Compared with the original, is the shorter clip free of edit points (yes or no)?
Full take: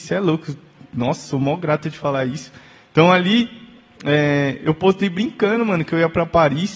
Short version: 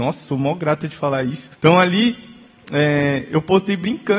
no